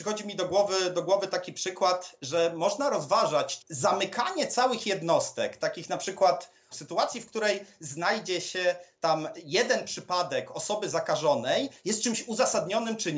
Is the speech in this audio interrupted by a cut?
yes; 2 cuts; at 3.6 s, 6.7 s

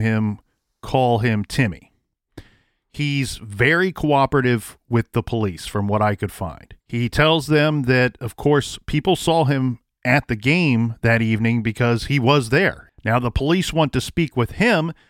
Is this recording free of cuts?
no; 2 cuts; at 6.8 s, 12.9 s

